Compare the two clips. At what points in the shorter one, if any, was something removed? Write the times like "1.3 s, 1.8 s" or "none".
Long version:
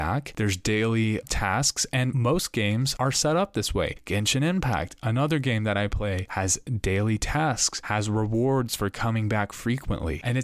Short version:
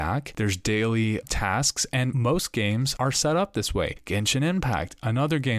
none